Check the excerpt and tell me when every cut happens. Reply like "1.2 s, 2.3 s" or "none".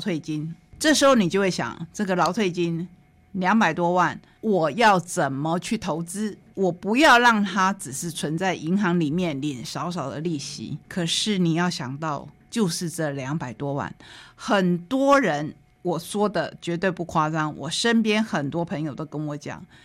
10.8 s

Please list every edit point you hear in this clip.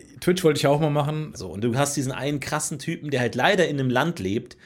1.3 s

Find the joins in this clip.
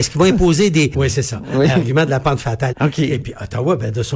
0.9 s, 2.7 s

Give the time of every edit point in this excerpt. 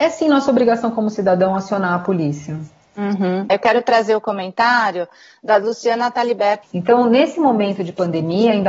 3.5 s, 6.6 s

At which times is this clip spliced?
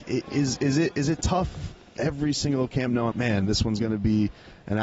2.0 s, 3.1 s

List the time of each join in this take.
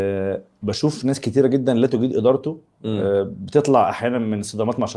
none

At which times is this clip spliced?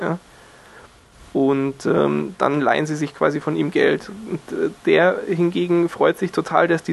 none

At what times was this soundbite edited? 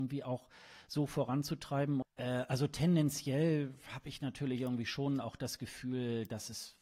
2.0 s

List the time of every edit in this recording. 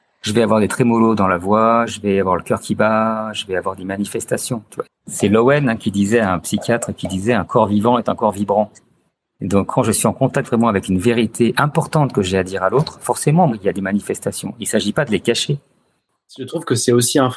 4.8 s, 13.5 s

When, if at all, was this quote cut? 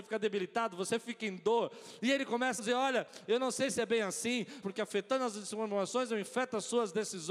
2.6 s, 4.6 s

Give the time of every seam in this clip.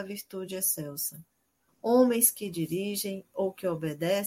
1.7 s

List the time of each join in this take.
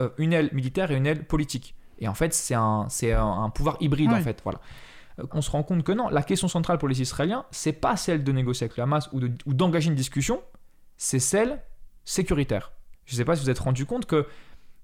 5.3 s, 12.9 s

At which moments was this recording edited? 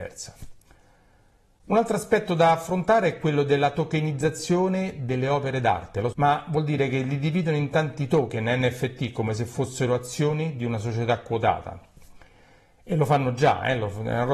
6.1 s

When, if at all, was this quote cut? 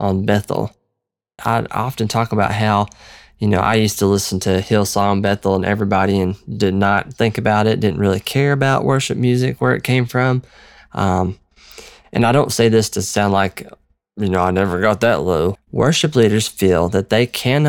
1.4 s, 15.6 s

